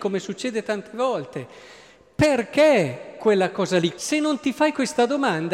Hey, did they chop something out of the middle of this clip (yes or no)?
yes